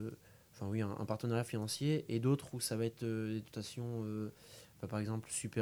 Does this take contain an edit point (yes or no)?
no